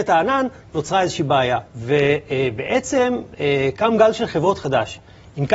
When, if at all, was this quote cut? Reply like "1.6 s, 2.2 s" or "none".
1.7 s